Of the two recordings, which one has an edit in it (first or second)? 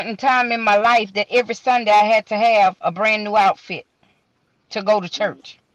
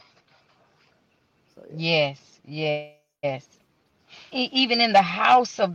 second